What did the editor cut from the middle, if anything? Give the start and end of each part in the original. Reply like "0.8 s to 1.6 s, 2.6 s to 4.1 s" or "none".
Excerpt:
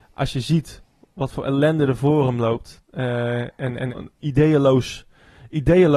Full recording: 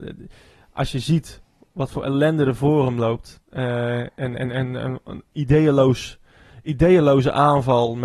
4.5 s to 5.0 s